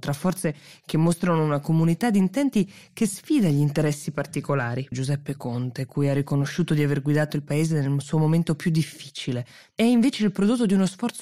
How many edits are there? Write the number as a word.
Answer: two